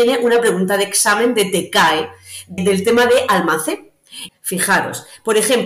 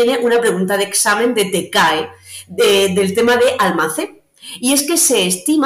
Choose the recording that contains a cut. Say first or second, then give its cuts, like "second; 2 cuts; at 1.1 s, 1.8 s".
first; 2 cuts; at 2.6 s, 4.3 s